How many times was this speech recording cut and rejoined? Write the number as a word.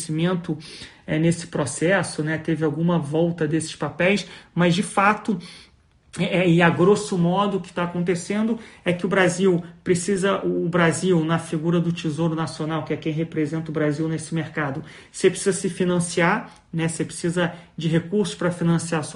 zero